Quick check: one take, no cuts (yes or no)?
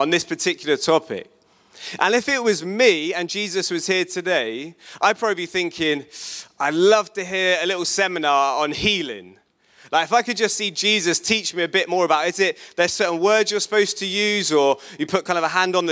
yes